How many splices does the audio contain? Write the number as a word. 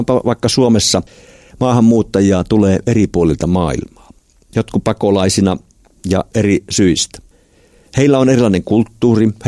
zero